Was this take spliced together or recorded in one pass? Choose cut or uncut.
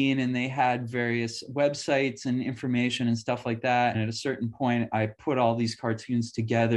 cut